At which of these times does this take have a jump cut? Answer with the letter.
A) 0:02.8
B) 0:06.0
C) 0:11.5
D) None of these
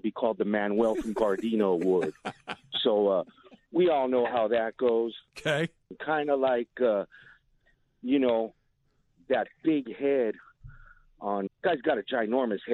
C